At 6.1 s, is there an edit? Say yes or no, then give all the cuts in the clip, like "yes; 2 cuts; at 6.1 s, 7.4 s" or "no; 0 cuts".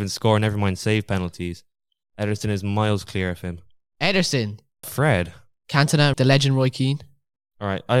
yes; 2 cuts; at 4.8 s, 6.1 s